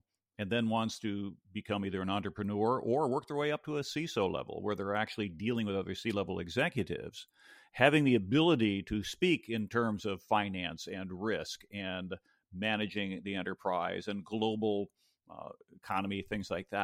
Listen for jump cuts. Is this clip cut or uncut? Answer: uncut